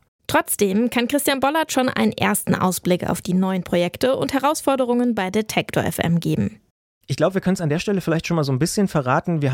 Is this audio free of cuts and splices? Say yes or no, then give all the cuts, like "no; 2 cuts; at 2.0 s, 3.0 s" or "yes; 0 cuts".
yes; 0 cuts